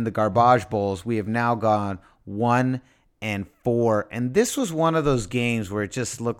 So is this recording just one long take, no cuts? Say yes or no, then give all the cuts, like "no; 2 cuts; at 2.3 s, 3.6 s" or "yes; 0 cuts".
yes; 0 cuts